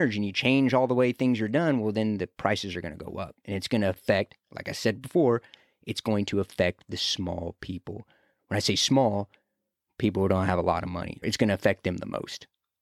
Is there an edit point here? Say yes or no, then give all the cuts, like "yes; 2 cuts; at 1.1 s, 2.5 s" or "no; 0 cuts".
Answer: yes; 1 cut; at 11.2 s